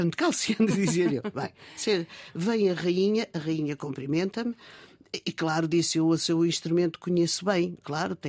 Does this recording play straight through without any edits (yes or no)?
yes